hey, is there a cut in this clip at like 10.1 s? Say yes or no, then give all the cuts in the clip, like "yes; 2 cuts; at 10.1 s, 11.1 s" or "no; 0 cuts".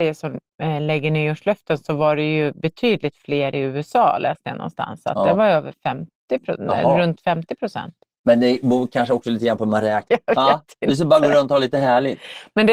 yes; 1 cut; at 10.1 s